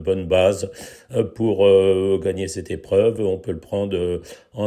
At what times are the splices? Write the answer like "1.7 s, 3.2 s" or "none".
none